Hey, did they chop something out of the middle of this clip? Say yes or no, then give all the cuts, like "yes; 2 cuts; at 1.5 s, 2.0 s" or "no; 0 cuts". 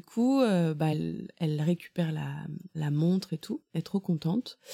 no; 0 cuts